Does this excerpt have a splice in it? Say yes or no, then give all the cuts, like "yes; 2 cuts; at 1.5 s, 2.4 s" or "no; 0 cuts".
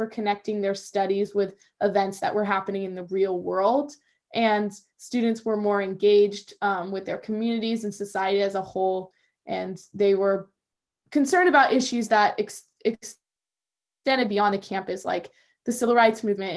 no; 0 cuts